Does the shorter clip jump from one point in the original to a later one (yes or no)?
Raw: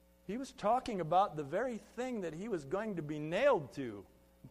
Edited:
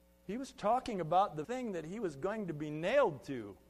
yes